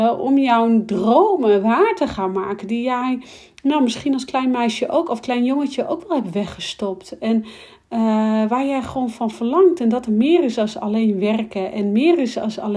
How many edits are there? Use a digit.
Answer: 0